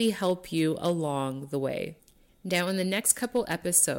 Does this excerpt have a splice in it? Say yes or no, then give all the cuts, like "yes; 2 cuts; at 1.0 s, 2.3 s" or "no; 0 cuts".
no; 0 cuts